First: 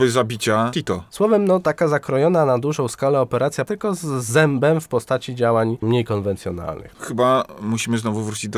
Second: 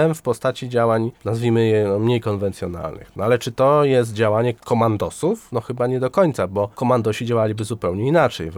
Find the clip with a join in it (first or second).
first